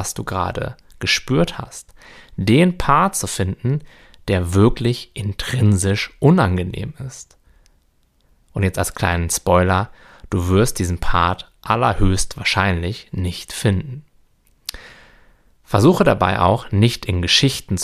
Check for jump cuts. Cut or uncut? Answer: uncut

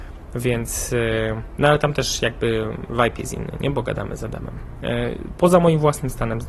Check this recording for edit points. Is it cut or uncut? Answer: cut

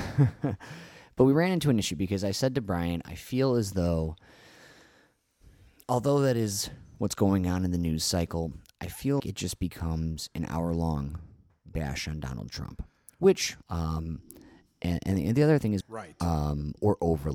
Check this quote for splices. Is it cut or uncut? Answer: cut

